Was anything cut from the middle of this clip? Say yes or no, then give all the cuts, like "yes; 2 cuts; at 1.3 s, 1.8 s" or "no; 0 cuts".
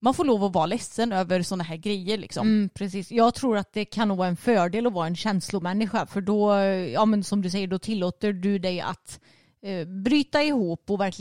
no; 0 cuts